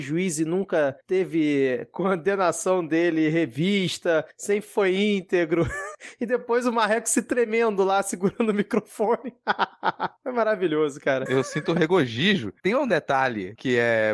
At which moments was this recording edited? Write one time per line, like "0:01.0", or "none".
0:11.3
0:12.6